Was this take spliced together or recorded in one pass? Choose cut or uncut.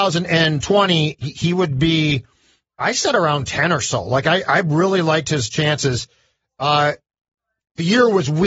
uncut